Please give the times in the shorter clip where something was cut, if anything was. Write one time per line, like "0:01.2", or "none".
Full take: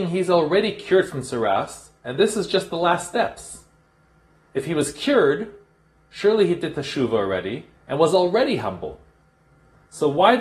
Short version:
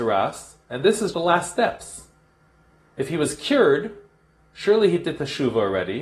0:01.1